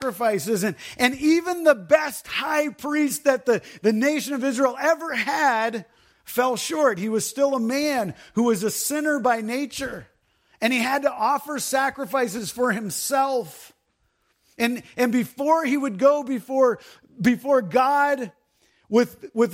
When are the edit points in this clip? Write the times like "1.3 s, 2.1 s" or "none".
none